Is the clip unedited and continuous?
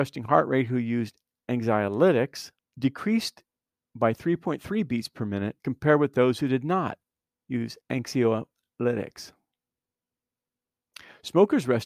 no; 3 cuts; at 2.6 s, 5.6 s, 7.8 s

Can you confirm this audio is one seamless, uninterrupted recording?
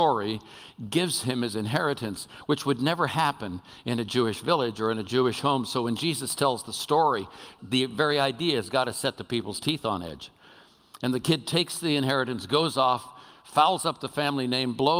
no; 1 cut; at 7.6 s

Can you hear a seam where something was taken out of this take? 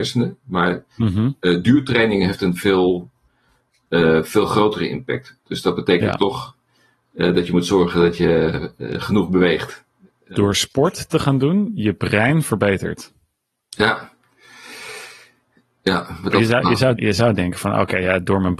yes; 2 cuts; at 10.3 s, 17.0 s

